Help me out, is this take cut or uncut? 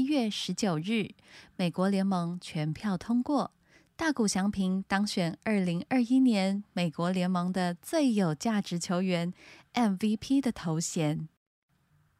uncut